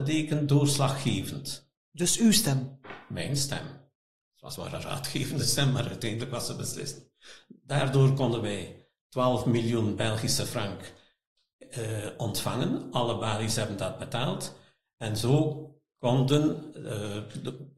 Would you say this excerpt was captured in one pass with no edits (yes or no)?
yes